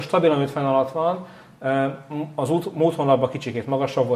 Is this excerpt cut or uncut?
uncut